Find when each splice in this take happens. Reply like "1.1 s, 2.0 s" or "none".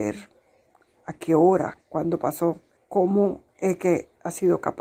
2.8 s